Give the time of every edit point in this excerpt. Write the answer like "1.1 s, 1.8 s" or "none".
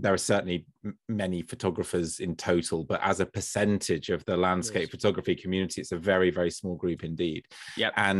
none